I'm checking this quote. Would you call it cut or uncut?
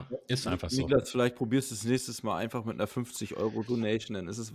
uncut